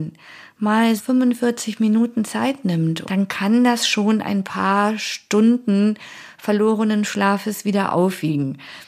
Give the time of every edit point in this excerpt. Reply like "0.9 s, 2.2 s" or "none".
1.0 s, 3.0 s